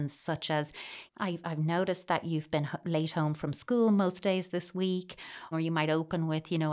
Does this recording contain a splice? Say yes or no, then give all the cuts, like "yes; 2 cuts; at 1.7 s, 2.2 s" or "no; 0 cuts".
yes; 2 cuts; at 1.1 s, 5.5 s